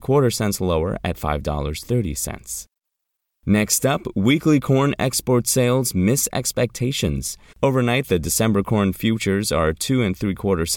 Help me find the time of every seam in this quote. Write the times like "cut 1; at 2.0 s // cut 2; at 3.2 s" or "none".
cut 1; at 7.5 s